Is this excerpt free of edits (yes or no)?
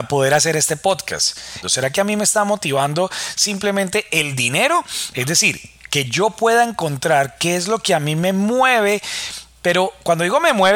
no